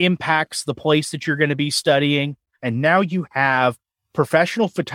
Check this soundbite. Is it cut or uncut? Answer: cut